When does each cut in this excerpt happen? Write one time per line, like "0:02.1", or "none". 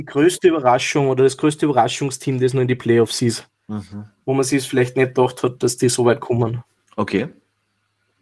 none